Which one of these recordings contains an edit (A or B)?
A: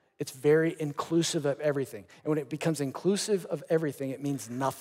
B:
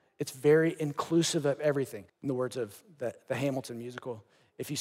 B